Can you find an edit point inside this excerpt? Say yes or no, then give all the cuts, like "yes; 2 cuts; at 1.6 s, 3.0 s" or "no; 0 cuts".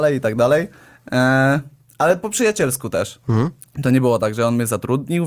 no; 0 cuts